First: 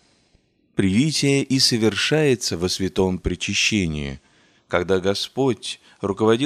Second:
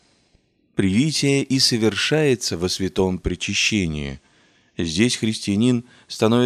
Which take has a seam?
first; 1 cut; at 4.6 s

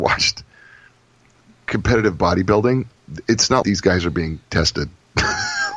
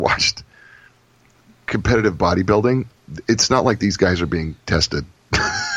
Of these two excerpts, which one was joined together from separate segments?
first; 1 cut; at 3.6 s

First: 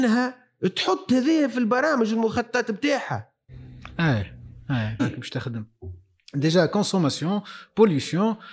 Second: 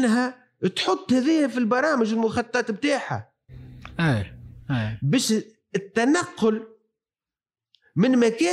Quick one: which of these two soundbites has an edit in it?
first; 1 cut; at 5.0 s

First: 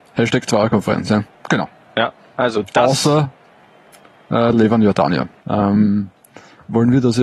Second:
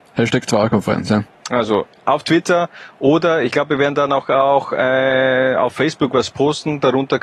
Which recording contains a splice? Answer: first; 2 cuts; at 1.4 s, 5.4 s

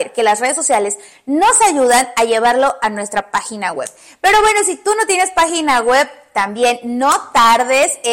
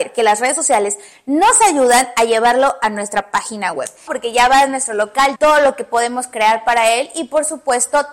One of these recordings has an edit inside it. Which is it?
second; 2 cuts; at 4.1 s, 5.4 s

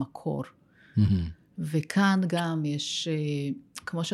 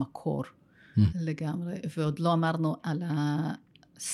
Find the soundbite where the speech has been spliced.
second; 1 cut; at 1.1 s

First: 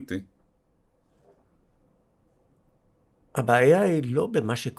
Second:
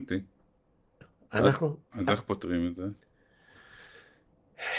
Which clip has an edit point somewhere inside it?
second; 1 cut; at 1.0 s

